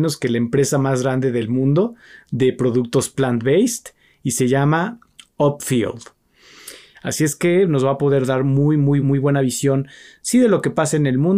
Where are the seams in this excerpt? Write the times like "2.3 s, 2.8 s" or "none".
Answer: 6.9 s, 9.0 s

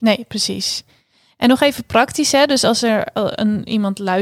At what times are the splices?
none

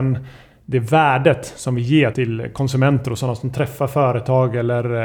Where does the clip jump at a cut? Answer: 2.1 s

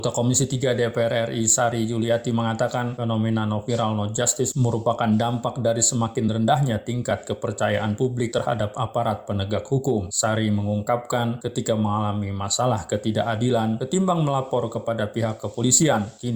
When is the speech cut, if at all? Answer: none

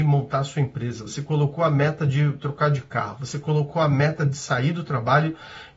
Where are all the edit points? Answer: none

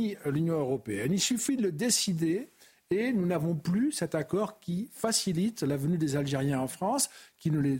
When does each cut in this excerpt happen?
none

